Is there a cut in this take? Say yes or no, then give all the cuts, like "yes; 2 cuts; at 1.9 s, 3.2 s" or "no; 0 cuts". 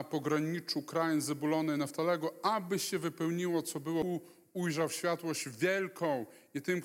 no; 0 cuts